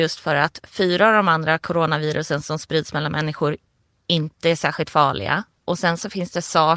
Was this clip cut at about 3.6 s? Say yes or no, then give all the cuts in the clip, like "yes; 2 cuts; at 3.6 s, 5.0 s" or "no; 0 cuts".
no; 0 cuts